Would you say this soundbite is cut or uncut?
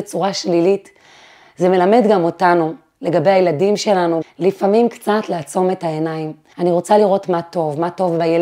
cut